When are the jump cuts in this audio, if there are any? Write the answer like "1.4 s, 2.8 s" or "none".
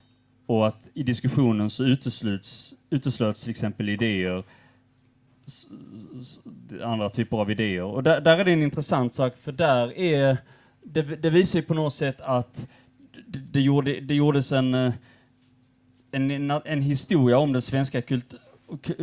none